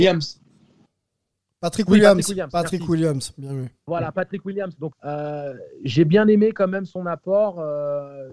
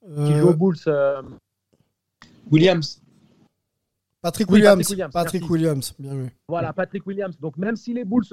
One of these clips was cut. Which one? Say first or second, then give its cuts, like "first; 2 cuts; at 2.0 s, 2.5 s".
first; 1 cut; at 4.9 s